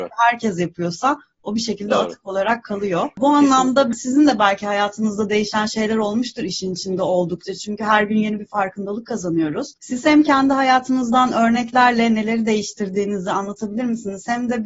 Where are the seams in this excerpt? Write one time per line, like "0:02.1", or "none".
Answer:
none

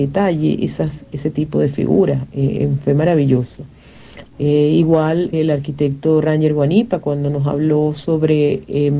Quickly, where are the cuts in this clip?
0:04.3
0:05.3

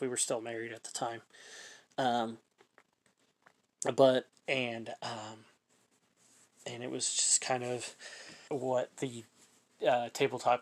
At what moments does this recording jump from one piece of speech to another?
0:04.3
0:08.5

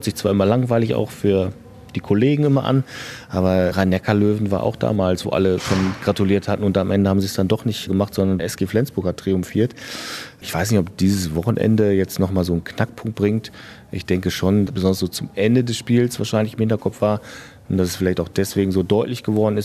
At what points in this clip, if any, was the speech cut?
0:14.7

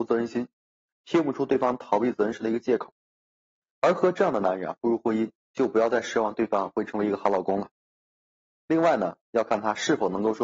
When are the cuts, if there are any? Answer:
0:00.9

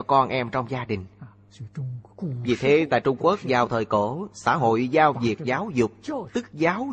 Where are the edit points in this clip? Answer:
0:02.1

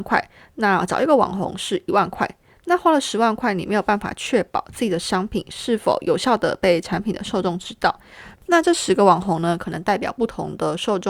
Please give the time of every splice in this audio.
0:08.3

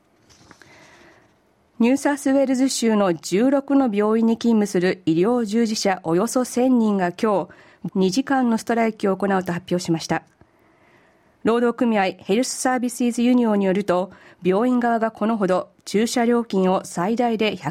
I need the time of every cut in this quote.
0:07.9

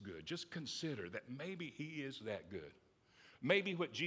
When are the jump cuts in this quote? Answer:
none

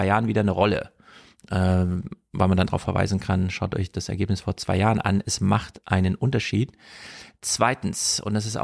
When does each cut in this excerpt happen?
0:02.7

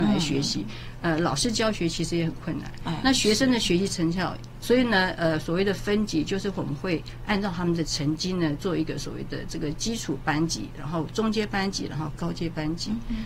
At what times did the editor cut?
0:04.6

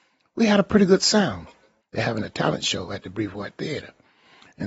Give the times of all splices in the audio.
0:01.8

